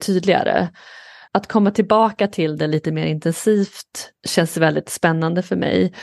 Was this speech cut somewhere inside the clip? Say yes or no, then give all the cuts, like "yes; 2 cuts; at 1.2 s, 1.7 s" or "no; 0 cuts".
yes; 1 cut; at 1.3 s